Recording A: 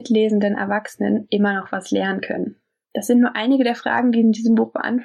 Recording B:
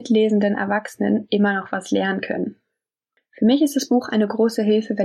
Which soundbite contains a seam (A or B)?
A